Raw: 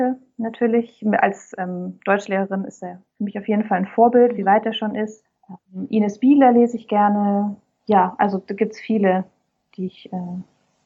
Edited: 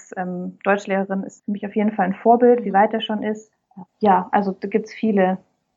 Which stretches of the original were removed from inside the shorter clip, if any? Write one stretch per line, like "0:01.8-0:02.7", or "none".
0:02.8-0:03.1
0:05.6-0:07.7